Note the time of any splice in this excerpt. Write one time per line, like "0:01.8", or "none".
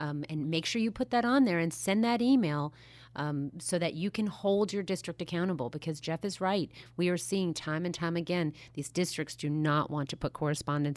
none